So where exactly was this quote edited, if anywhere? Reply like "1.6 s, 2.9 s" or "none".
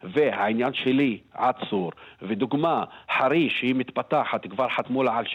none

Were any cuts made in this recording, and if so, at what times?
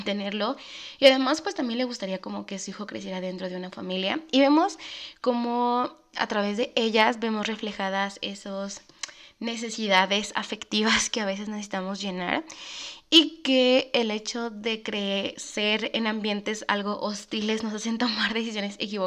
6.1 s

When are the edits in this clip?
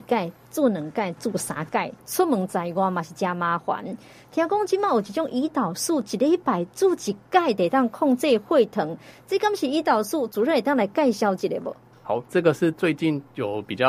2.0 s

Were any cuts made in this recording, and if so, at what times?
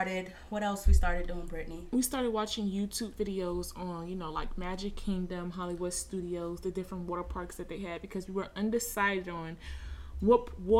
none

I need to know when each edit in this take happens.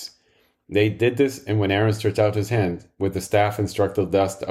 none

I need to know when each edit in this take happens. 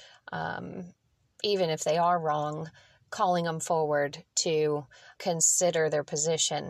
5.2 s

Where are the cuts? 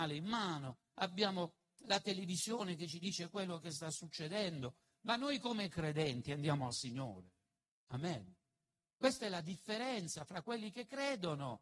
none

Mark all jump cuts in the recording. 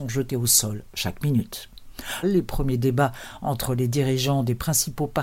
2.2 s

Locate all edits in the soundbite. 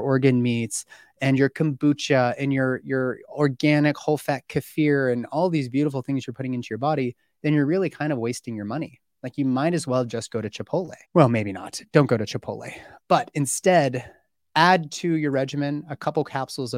11.0 s

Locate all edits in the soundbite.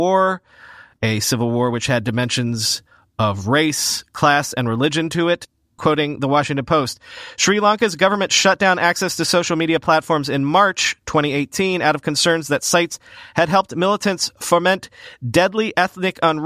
5.8 s

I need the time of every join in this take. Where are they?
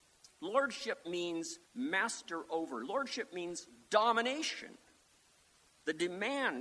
1.7 s

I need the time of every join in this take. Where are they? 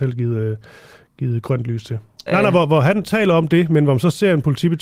2.3 s

